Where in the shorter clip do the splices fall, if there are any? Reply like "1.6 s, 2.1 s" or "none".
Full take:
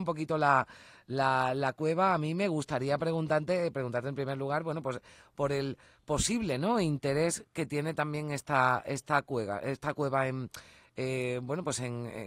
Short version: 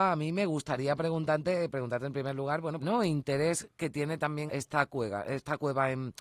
2.8 s, 4.5 s